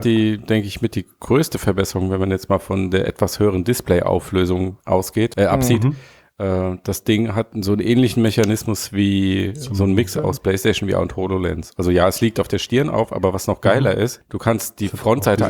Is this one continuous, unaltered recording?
yes; 0 cuts

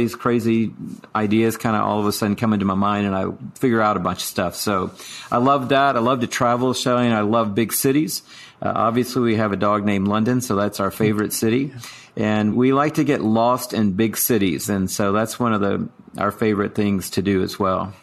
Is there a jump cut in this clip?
yes; 1 cut; at 12.5 s

